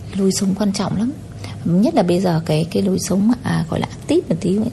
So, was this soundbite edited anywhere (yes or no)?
yes